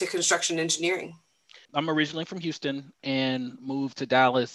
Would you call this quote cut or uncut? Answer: cut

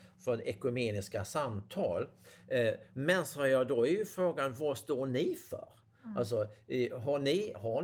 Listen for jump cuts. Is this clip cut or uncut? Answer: cut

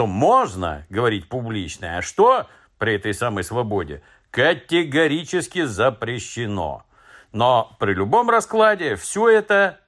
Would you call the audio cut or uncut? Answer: uncut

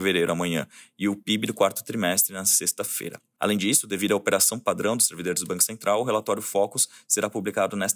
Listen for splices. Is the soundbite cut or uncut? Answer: uncut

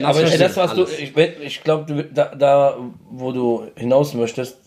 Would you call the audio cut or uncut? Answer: uncut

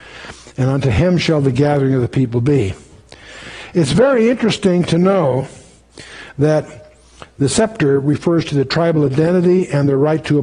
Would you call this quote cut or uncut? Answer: uncut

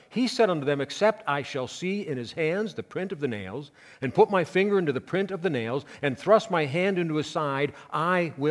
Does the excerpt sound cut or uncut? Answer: uncut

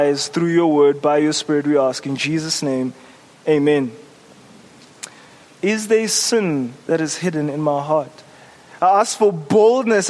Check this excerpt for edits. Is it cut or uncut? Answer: cut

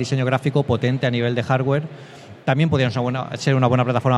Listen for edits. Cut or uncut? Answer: uncut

